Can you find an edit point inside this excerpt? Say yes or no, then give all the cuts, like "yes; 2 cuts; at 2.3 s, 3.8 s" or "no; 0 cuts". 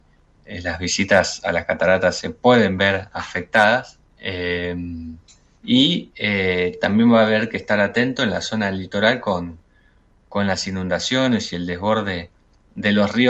yes; 1 cut; at 4.1 s